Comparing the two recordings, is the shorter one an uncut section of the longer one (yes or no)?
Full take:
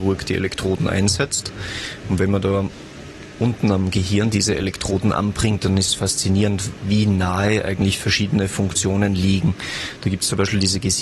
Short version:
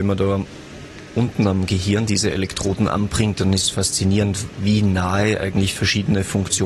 yes